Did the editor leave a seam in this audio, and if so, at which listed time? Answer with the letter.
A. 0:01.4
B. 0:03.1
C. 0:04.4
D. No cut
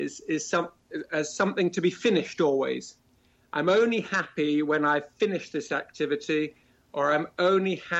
D